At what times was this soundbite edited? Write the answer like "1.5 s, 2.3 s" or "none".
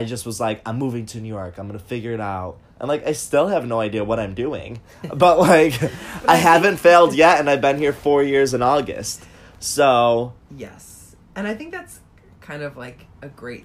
none